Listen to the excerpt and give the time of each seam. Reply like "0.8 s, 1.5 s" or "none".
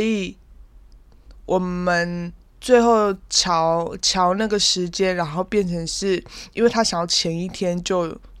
none